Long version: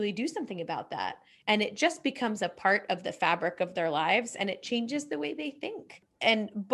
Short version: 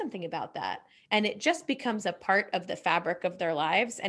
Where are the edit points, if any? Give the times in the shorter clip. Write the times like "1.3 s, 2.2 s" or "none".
none